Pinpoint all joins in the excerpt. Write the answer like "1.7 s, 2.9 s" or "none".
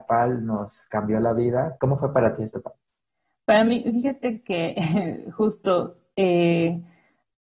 1.8 s